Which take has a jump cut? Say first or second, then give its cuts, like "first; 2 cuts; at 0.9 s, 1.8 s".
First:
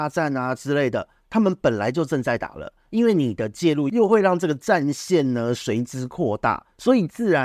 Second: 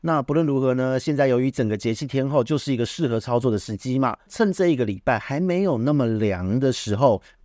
second; 1 cut; at 4.3 s